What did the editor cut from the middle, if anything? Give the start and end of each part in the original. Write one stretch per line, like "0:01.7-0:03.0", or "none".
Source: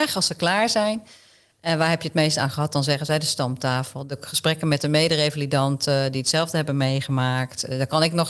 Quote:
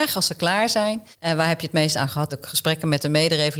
0:01.1-0:01.5
0:02.7-0:04.1

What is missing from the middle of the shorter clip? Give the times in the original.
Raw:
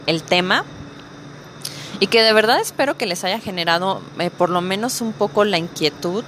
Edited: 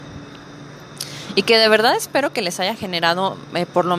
none

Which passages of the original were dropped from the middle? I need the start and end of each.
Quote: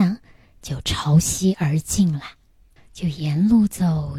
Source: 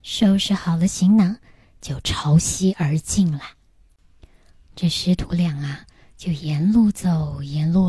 0:04.0-0:06.0

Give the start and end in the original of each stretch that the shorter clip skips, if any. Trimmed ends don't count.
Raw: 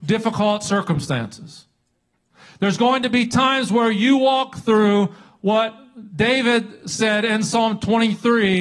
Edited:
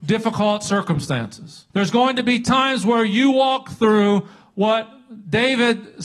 0:01.7-0:02.6

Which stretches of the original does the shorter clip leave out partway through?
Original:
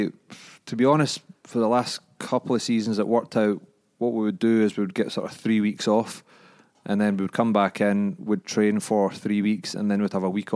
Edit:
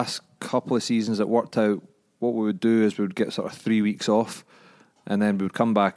none

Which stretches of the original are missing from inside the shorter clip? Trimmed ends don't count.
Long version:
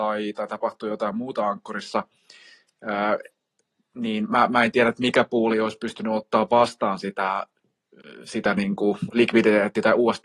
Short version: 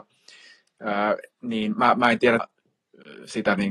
0:03.3-0:03.8
0:04.9-0:07.4

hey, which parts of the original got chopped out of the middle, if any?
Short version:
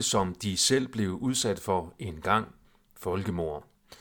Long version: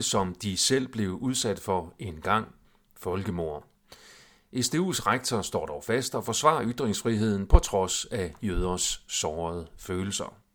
none

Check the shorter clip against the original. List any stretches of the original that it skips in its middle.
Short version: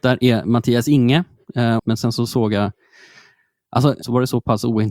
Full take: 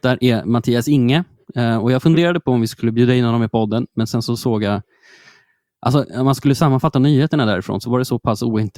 0:01.8-0:03.9
0:06.1-0:07.8

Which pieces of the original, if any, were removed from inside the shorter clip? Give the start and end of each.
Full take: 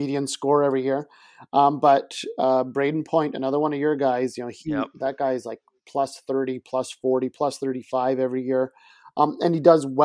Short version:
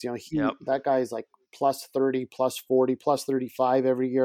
none

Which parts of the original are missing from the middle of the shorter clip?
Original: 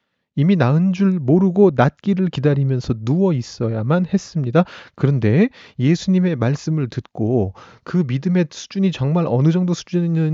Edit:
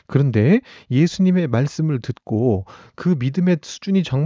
none

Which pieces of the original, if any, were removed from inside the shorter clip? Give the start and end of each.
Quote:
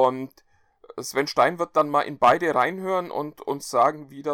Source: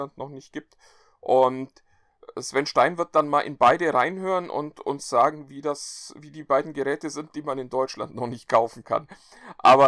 none

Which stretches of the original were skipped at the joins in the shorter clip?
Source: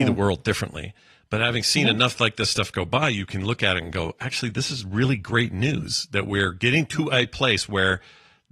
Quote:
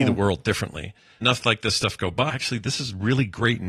0:01.2-0:02.0
0:03.0-0:04.2

